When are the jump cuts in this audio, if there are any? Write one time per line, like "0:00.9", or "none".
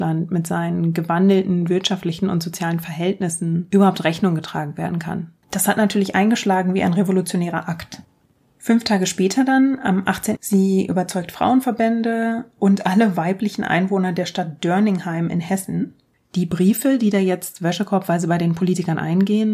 0:05.4
0:10.4